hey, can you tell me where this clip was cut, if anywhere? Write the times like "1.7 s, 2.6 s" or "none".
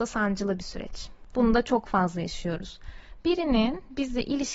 1.3 s